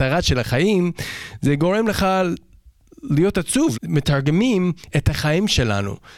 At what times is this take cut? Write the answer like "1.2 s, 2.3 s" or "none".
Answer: 3.7 s, 4.9 s